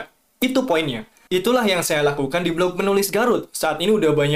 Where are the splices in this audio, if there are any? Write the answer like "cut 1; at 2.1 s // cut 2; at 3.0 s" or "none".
cut 1; at 1.3 s